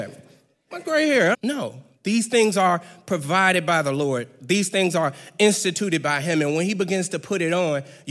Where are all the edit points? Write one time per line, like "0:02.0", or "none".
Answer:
0:01.3